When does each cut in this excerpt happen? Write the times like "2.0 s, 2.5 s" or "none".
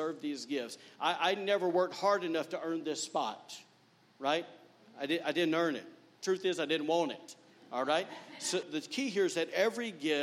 8.6 s